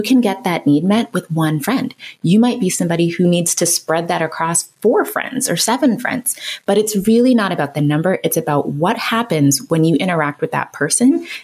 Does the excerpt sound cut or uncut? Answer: uncut